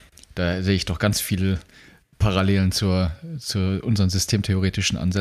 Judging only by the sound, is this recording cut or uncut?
uncut